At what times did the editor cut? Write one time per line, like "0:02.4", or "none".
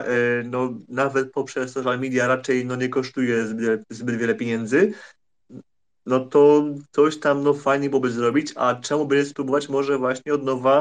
none